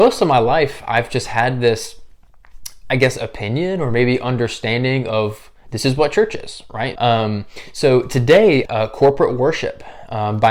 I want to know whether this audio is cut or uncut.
cut